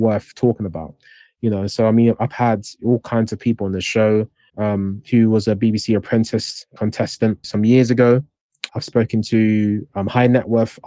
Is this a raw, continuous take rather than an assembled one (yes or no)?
no